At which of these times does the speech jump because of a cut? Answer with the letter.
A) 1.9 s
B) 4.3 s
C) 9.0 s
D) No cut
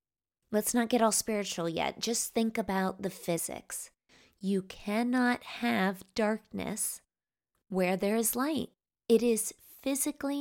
D